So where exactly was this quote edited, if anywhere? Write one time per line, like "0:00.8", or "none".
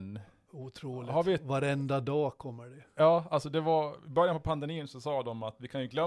none